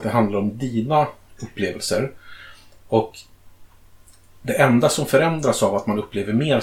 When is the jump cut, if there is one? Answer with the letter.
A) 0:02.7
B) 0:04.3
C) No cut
C